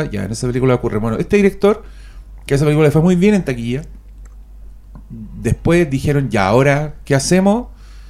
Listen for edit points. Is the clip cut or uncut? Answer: uncut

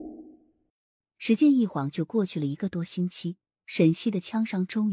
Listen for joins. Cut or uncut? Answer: uncut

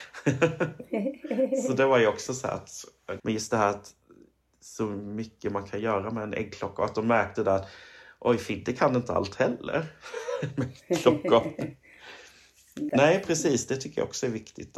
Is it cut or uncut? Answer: cut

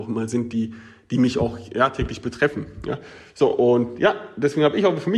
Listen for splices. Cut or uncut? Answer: uncut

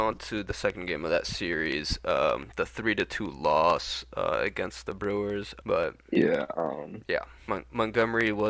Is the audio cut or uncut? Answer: cut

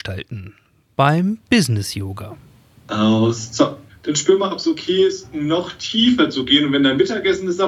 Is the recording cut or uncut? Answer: uncut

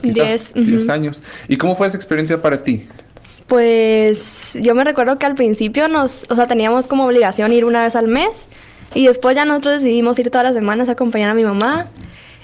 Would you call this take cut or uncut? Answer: uncut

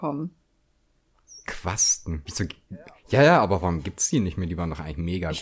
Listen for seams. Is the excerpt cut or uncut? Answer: cut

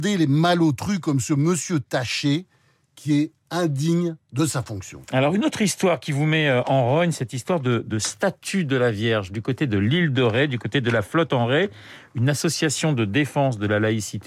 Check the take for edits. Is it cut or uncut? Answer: uncut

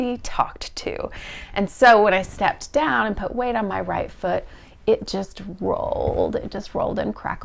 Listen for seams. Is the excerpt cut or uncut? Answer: uncut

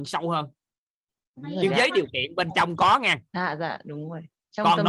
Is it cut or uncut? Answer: cut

